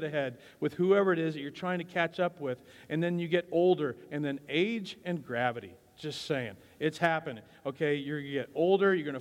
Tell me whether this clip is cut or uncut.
uncut